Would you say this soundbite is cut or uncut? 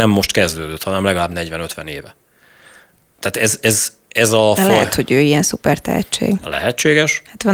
uncut